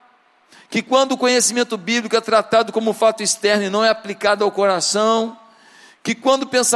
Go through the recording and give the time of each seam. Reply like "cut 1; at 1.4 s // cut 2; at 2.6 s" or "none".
none